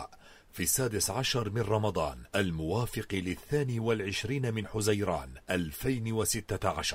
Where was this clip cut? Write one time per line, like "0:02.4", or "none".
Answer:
0:02.3
0:05.4